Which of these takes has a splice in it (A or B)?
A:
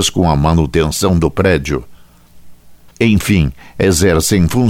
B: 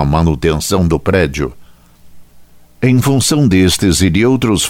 A